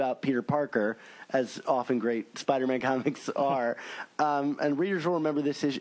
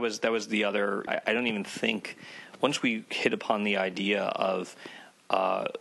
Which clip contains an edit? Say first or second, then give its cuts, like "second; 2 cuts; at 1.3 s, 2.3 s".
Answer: second; 1 cut; at 1.1 s